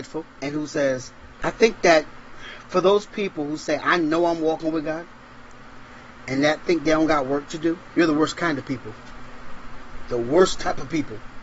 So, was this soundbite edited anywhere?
yes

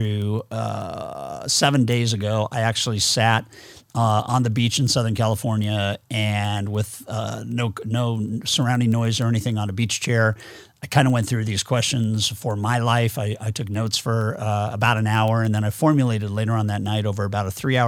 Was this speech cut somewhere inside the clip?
no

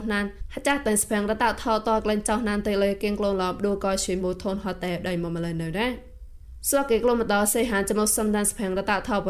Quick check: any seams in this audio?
yes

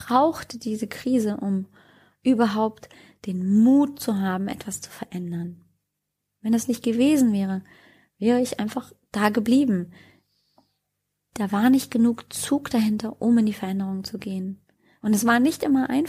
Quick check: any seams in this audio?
no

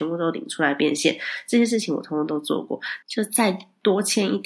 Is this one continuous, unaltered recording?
no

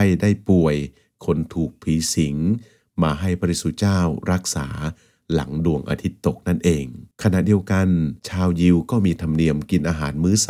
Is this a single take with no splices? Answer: no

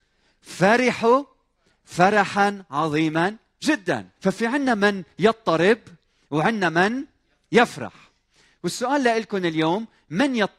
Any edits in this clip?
yes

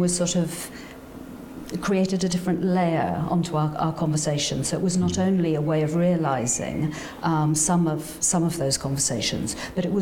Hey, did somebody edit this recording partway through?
no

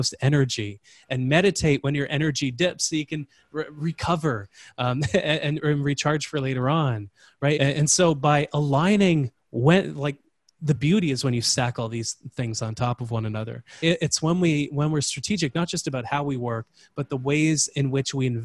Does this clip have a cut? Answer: yes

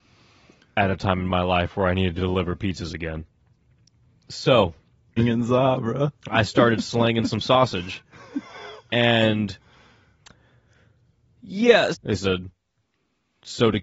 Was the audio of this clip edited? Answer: yes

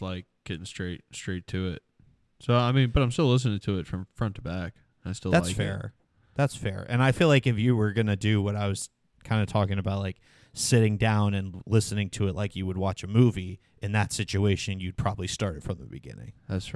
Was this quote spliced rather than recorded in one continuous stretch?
no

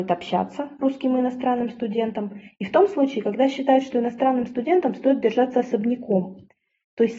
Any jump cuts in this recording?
no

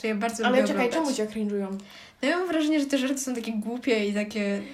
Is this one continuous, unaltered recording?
yes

